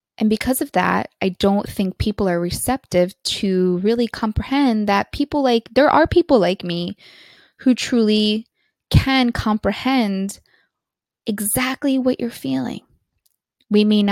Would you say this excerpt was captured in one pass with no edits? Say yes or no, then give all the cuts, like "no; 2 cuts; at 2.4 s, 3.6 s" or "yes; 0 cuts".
yes; 0 cuts